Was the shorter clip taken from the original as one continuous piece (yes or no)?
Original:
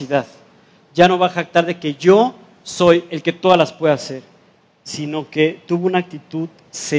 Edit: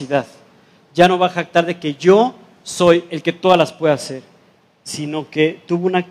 yes